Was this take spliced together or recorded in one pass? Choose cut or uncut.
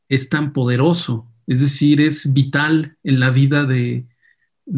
uncut